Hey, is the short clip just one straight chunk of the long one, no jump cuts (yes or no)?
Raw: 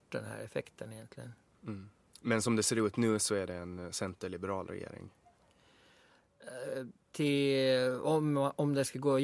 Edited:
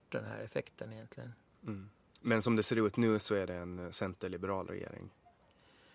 yes